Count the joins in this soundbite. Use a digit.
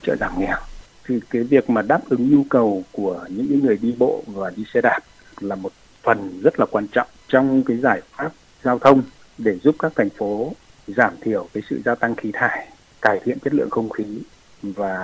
0